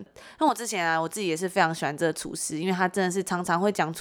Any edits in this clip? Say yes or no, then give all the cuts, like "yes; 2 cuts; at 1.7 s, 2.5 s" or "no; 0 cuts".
no; 0 cuts